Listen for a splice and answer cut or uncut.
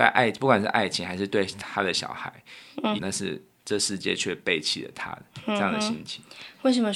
cut